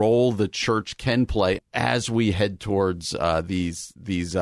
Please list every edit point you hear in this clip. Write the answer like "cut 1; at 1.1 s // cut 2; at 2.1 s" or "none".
cut 1; at 1.6 s

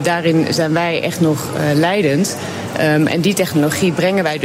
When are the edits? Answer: none

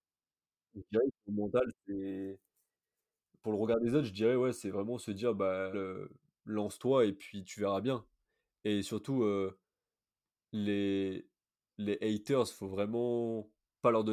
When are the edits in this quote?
cut 1; at 5.7 s

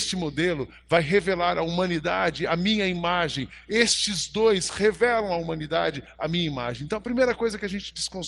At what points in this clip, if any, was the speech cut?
none

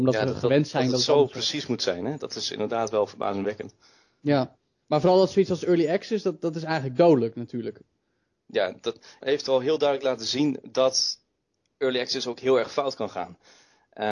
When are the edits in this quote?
cut 1; at 9.2 s

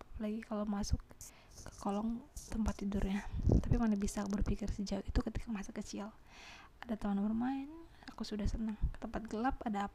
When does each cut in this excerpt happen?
cut 1; at 8.0 s

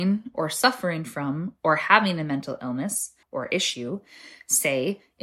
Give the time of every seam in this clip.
cut 1; at 3.2 s

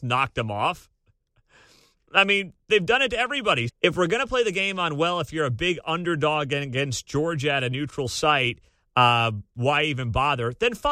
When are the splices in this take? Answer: cut 1; at 2.6 s // cut 2; at 3.7 s

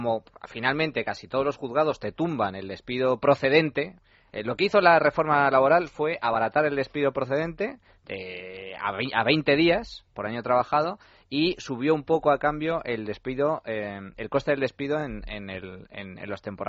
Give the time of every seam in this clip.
none

